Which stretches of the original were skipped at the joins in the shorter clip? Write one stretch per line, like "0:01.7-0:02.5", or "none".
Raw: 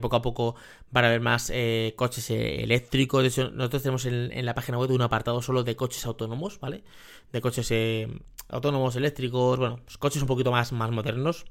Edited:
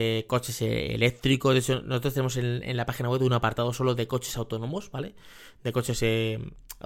none